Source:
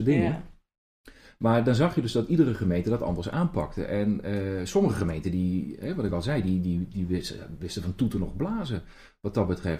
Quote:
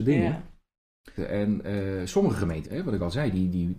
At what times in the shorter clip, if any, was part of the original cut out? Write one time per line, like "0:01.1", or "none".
0:01.2
0:02.6